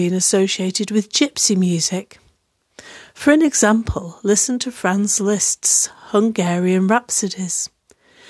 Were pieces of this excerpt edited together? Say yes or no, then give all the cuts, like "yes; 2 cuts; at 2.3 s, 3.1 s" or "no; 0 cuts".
no; 0 cuts